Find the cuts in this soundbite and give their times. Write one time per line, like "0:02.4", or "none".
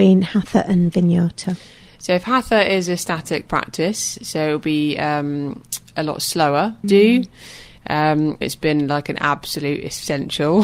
0:06.8
0:08.4